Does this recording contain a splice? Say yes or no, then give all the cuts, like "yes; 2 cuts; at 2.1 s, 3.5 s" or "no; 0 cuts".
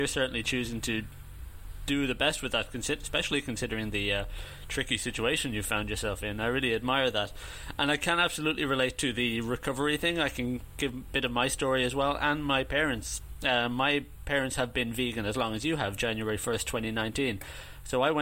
no; 0 cuts